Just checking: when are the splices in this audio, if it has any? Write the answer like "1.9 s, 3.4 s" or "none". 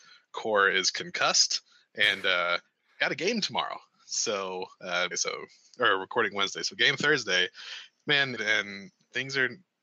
5.1 s, 8.4 s